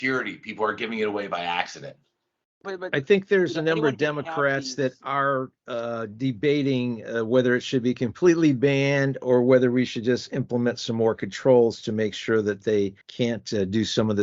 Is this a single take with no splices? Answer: no; 1 cut; at 13.0 s

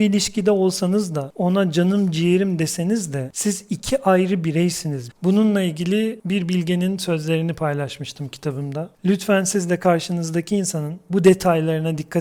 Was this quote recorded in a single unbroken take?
no; 1 cut; at 5.1 s

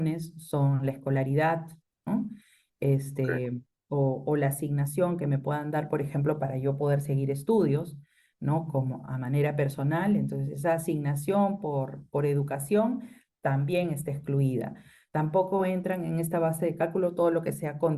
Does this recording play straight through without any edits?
yes; 0 cuts

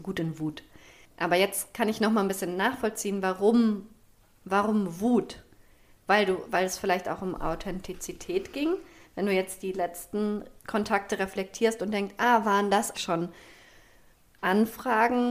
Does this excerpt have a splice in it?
yes; 2 cuts; at 10.6 s, 12.9 s

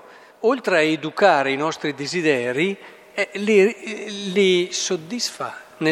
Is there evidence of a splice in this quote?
no; 0 cuts

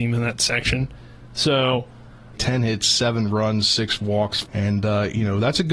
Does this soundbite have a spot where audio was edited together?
yes; 2 cuts; at 2.3 s, 4.4 s

